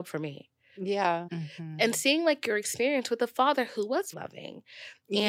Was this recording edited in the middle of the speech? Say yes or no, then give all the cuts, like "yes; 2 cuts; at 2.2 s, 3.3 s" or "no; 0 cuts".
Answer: yes; 2 cuts; at 1.3 s, 4.1 s